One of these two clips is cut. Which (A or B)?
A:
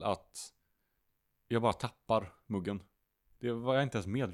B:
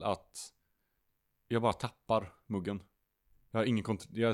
A